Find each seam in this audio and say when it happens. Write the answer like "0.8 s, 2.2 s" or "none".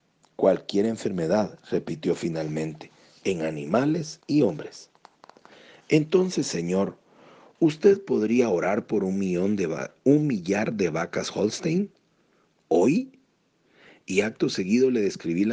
none